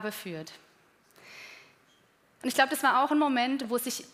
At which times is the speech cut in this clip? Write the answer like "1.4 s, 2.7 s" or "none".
2.4 s